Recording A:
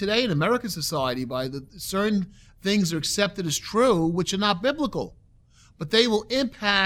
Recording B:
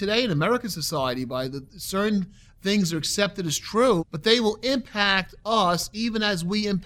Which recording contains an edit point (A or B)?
B